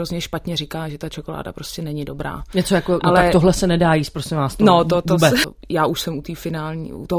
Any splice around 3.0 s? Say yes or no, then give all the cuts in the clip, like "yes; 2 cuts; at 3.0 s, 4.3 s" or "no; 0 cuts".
no; 1 cut; at 5.4 s